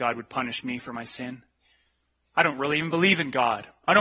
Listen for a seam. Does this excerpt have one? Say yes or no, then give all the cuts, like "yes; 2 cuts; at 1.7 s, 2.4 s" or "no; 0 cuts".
no; 0 cuts